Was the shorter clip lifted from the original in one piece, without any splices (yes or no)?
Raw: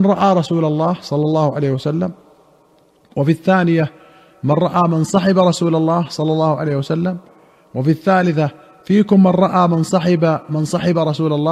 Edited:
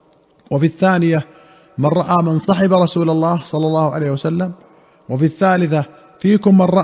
yes